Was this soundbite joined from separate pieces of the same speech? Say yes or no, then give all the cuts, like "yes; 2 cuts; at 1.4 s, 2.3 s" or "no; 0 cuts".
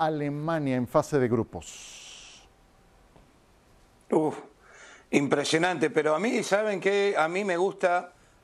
no; 0 cuts